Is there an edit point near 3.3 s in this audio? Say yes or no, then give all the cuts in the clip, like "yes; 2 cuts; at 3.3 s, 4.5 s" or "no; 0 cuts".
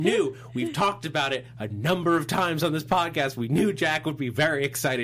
no; 0 cuts